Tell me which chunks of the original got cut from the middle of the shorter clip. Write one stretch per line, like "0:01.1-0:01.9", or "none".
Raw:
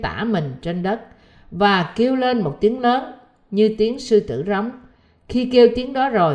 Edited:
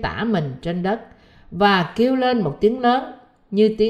none